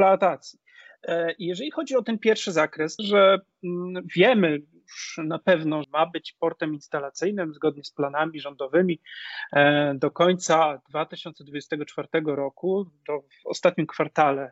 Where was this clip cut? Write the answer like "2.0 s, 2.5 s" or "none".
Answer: 3.0 s, 5.8 s